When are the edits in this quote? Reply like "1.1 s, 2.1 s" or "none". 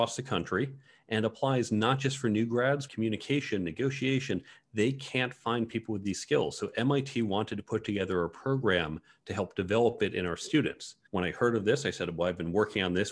2.9 s, 11.1 s